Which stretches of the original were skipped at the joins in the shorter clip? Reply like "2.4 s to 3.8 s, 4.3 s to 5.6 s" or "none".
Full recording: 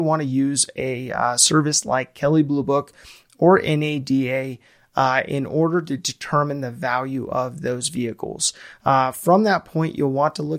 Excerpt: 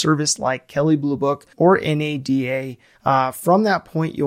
3.0 s to 3.3 s, 4.8 s to 8.8 s